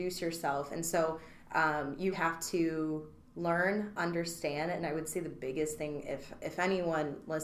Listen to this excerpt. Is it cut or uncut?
cut